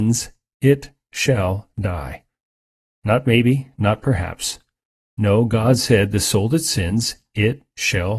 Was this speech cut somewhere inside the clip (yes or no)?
no